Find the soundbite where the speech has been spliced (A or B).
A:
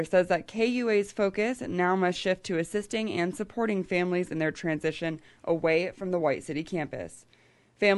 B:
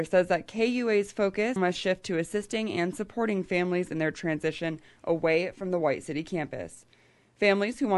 B